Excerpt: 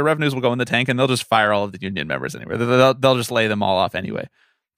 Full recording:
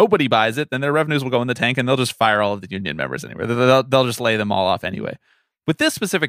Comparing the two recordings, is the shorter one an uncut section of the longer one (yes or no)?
yes